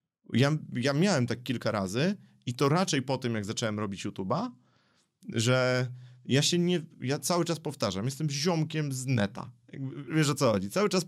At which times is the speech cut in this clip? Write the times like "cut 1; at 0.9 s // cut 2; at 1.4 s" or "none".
cut 1; at 10.1 s